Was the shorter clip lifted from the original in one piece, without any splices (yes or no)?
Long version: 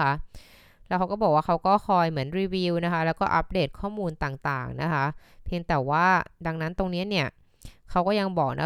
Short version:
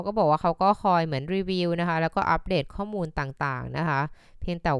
yes